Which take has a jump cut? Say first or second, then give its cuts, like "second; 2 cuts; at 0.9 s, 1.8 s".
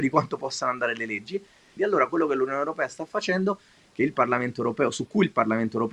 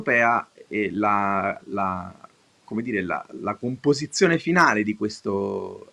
first; 1 cut; at 1.8 s